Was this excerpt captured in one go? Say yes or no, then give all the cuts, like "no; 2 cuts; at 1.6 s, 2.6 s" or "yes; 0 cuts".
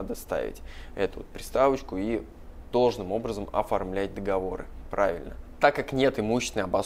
yes; 0 cuts